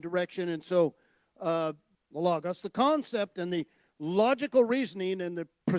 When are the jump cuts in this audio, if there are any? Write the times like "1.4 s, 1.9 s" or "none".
1.9 s